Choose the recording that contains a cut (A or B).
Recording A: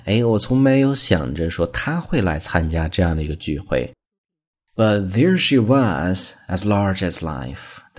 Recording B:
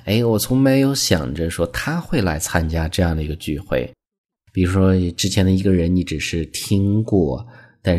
B